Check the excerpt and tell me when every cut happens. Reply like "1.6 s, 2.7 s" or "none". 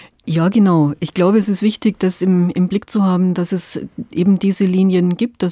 none